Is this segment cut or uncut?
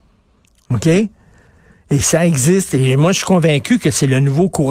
uncut